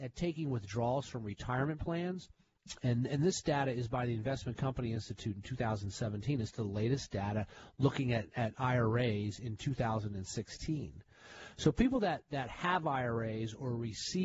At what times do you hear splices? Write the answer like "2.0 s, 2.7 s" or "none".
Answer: none